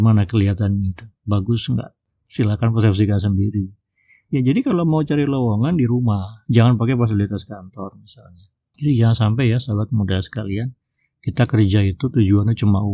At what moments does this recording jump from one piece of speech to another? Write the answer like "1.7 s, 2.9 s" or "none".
none